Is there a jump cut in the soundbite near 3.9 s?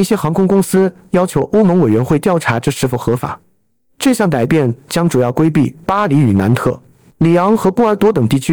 no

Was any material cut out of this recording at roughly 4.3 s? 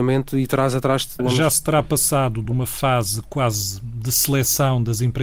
no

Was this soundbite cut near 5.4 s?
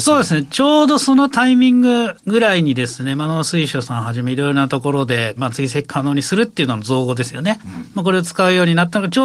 yes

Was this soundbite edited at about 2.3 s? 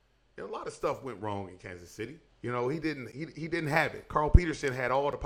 yes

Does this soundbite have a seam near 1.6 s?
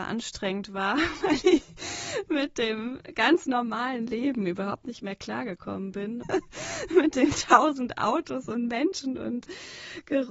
no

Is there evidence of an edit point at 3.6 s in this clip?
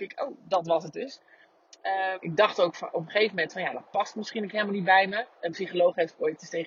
no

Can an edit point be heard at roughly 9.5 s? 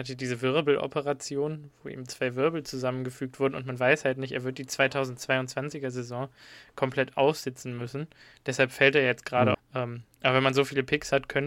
yes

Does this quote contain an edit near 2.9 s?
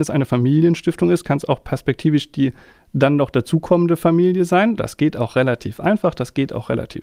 no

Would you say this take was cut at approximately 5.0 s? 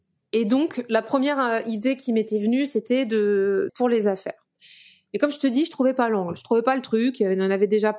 no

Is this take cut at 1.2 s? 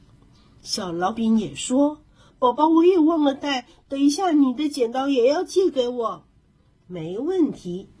yes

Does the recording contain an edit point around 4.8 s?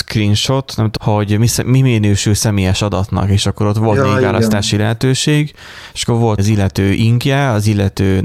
no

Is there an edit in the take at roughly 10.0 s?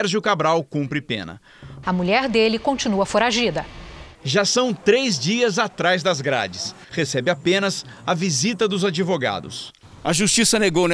no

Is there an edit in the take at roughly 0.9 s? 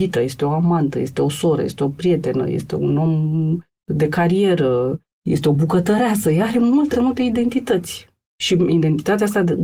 no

